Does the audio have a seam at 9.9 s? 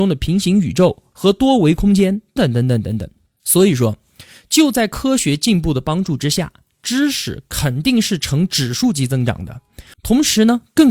yes; 2 cuts; at 2.4 s, 9.9 s

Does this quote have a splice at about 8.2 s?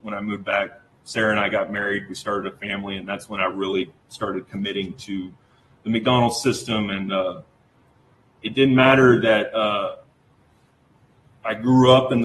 no; 0 cuts

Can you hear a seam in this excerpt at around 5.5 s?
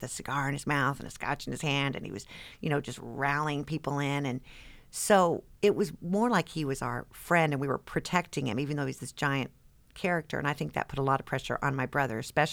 yes; 1 cut; at 5.5 s

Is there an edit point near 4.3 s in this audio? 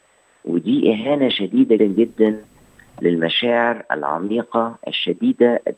no; 1 cut; at 1.8 s

